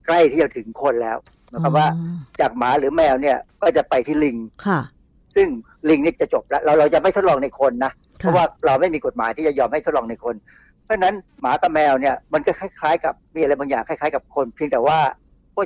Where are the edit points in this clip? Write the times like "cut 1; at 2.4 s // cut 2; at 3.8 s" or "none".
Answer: cut 1; at 8.6 s